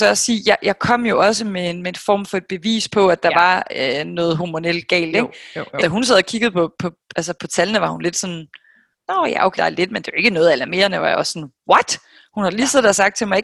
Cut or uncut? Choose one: cut